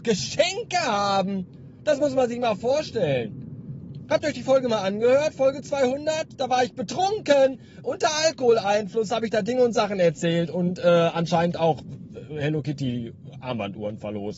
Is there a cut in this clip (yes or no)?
no